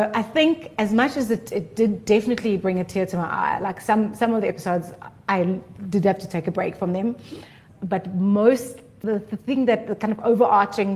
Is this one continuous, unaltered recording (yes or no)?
yes